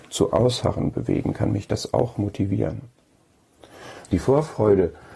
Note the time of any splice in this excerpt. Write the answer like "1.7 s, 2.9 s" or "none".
4.0 s